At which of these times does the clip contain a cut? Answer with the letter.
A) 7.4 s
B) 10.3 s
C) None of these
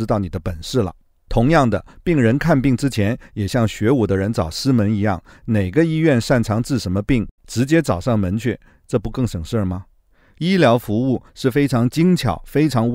A